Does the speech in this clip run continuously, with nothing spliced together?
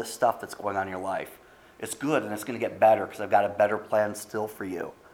yes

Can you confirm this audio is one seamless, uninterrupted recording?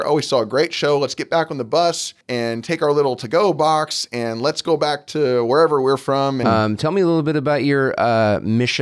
no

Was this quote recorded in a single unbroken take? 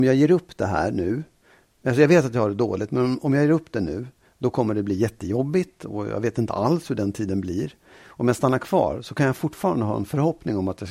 yes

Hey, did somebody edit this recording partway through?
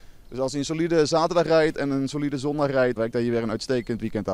yes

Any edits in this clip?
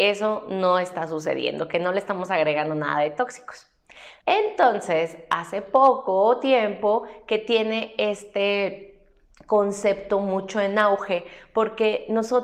yes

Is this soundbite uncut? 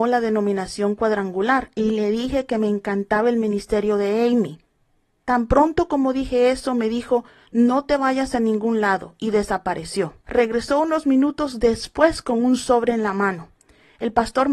no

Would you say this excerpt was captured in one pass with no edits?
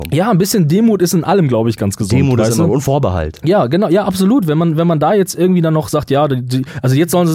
yes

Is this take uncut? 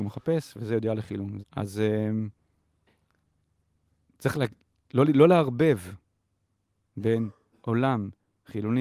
no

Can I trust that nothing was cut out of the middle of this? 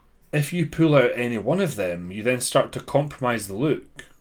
yes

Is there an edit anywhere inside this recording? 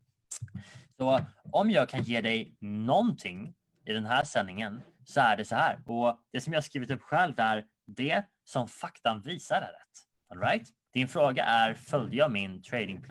yes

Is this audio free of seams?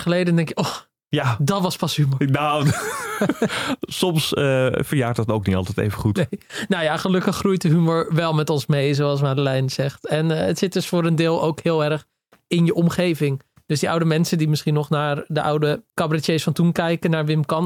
yes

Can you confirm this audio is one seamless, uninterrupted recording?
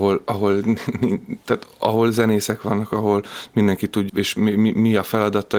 no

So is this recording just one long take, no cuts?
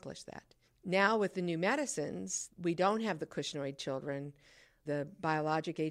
yes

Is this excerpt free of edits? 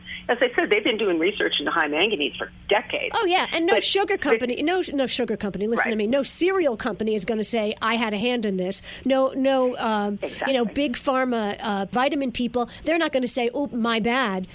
yes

